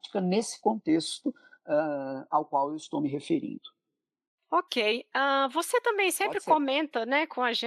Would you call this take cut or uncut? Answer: uncut